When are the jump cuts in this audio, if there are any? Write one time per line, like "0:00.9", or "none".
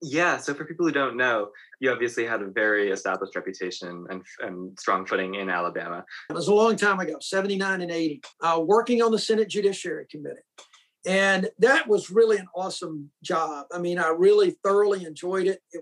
0:06.3
0:08.3